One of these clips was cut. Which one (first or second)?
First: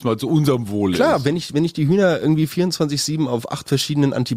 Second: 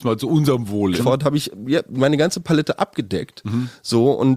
second